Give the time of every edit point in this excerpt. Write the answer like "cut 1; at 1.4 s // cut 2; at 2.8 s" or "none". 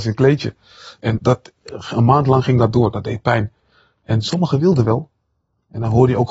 cut 1; at 1.2 s

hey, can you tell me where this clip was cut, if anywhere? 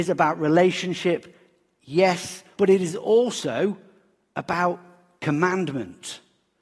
cut 1; at 2.6 s

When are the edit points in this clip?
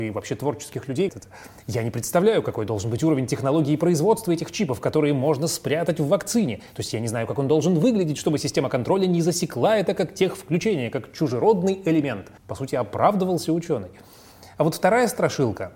cut 1; at 1.1 s // cut 2; at 12.4 s

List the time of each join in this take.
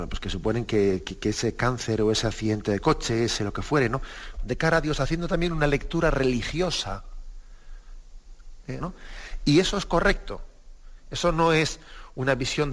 cut 1; at 4.4 s // cut 2; at 8.8 s

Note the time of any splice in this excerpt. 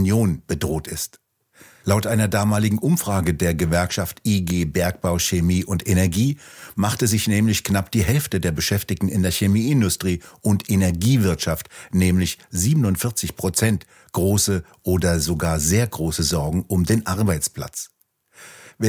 cut 1; at 1.8 s

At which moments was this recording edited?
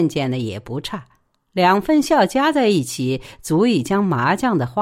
none

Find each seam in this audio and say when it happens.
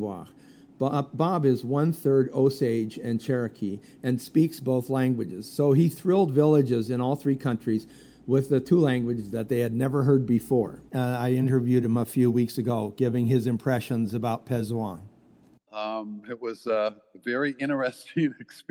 cut 1; at 10.9 s // cut 2; at 15.7 s

